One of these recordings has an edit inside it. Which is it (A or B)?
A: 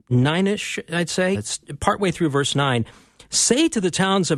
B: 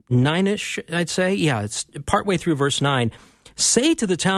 A